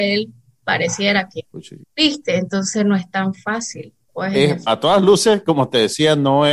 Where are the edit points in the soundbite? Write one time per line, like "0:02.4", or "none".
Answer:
0:01.8
0:04.7